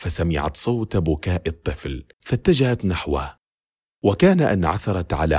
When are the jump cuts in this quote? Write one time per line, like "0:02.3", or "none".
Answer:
0:02.1